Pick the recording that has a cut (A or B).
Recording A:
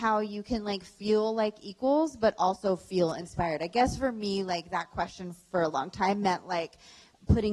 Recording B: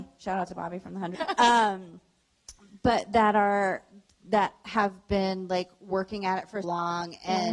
B